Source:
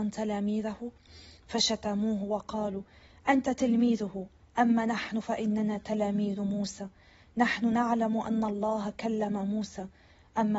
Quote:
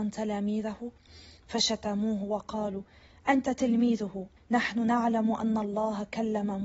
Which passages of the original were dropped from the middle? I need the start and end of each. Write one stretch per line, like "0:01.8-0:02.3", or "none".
0:04.4-0:07.2